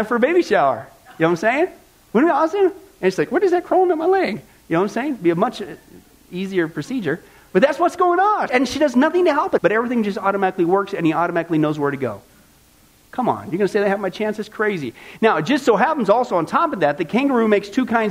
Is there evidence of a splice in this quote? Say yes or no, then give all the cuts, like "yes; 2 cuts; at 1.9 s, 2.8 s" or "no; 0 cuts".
yes; 2 cuts; at 8.5 s, 9.6 s